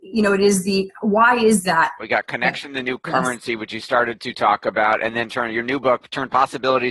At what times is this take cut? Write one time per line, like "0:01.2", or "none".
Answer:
0:02.0